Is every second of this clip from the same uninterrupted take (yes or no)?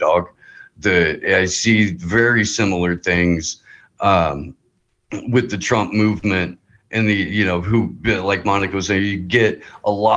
yes